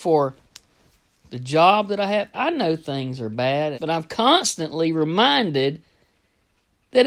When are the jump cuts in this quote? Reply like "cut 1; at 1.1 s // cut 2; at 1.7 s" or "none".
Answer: cut 1; at 2.3 s // cut 2; at 3.7 s